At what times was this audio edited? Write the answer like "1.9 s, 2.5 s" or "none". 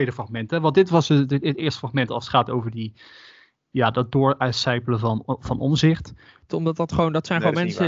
6.5 s